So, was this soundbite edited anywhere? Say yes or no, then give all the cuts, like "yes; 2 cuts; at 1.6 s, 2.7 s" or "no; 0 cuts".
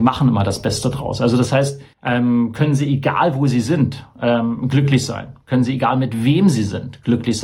yes; 1 cut; at 1.9 s